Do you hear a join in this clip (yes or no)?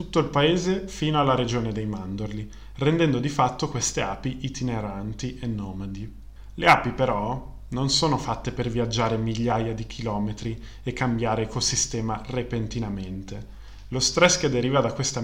no